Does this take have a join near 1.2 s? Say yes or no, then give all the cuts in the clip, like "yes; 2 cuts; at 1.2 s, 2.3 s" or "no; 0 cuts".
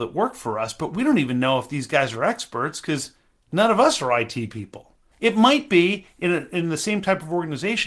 no; 1 cut; at 5.1 s